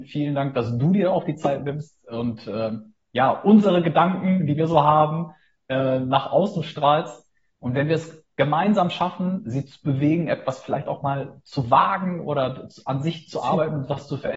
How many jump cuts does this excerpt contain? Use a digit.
1